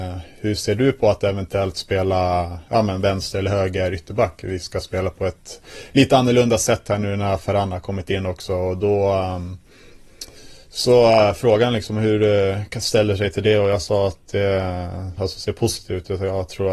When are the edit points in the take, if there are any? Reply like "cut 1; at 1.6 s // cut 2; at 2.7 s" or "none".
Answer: cut 1; at 15.2 s